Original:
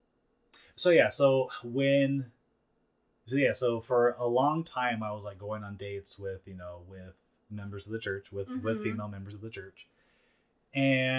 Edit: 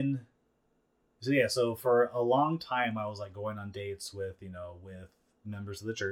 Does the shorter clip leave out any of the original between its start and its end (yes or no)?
no